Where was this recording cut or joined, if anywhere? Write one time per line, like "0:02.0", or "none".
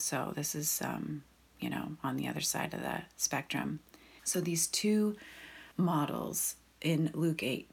0:04.2
0:05.7